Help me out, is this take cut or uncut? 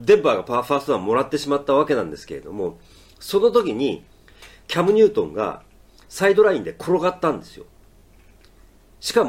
uncut